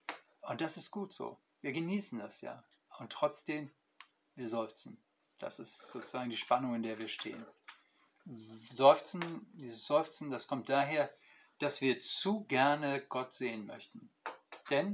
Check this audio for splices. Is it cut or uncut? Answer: uncut